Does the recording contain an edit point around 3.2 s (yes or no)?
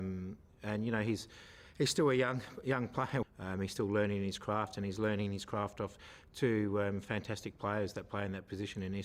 yes